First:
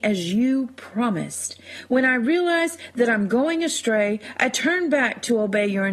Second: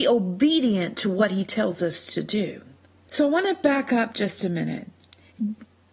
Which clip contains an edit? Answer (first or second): second